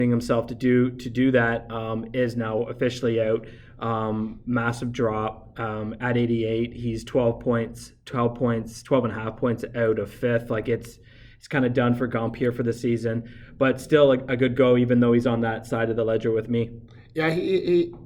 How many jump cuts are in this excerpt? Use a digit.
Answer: 0